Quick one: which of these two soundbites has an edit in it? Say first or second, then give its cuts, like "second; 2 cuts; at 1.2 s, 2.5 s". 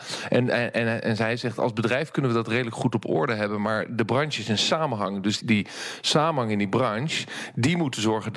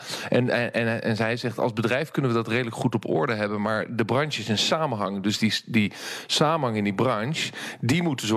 first; 1 cut; at 5.4 s